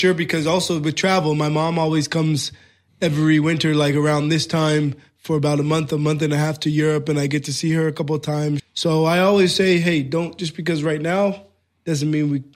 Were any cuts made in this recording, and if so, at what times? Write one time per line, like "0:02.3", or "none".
0:08.6